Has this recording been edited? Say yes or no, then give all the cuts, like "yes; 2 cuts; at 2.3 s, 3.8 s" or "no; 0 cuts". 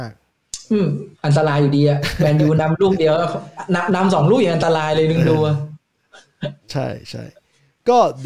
yes; 2 cuts; at 1.1 s, 6.6 s